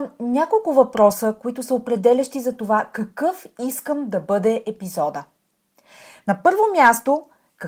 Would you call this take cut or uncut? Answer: uncut